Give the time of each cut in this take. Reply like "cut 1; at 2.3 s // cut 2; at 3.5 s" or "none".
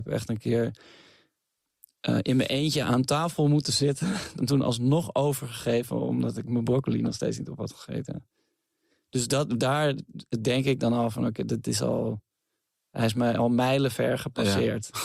cut 1; at 4.4 s